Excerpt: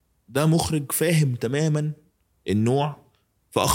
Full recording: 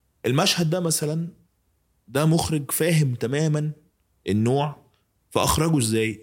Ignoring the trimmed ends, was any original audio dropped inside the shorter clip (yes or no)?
no